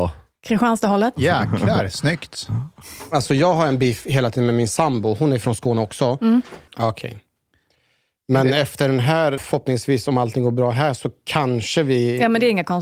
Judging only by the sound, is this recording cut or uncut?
cut